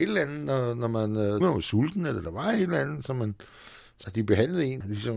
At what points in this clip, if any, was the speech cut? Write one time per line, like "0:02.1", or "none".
0:01.4